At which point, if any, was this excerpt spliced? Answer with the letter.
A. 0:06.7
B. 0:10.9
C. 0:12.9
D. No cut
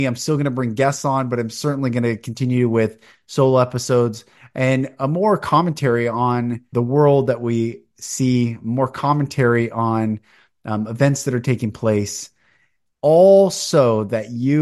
A